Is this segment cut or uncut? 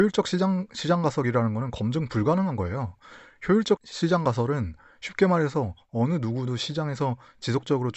cut